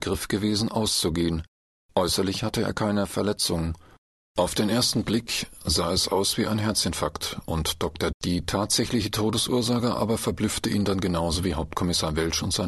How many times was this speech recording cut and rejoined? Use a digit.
1